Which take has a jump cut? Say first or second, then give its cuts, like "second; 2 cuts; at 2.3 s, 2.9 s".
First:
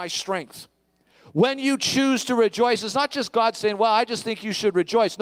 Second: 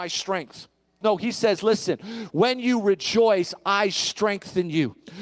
second; 1 cut; at 1.0 s